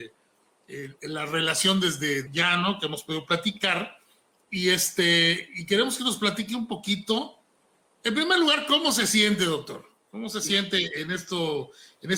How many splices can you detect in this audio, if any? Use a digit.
1